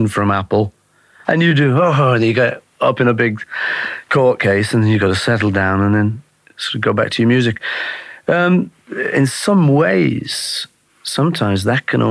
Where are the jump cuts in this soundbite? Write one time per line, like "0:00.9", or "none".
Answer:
none